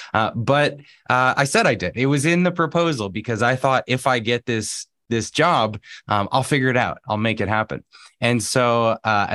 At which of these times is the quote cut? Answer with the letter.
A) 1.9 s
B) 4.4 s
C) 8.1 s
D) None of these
D